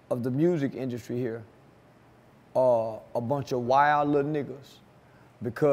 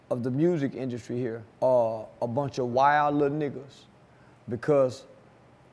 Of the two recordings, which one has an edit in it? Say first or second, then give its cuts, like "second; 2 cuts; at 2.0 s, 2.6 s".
second; 1 cut; at 1.5 s